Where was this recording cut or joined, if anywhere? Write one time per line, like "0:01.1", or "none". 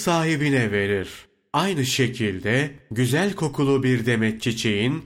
none